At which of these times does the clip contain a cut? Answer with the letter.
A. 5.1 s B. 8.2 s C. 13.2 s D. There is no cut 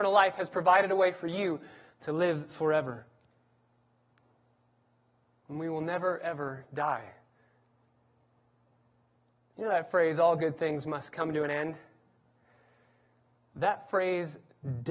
D